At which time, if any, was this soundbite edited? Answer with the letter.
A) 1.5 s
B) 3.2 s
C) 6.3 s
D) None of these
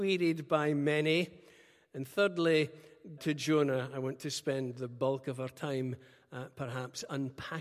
B